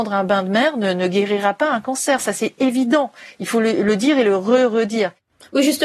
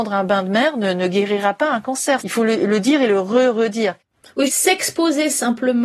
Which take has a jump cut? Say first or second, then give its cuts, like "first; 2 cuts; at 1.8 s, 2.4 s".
second; 2 cuts; at 2.2 s, 4.5 s